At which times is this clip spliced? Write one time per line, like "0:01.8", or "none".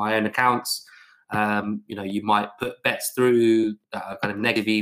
0:03.8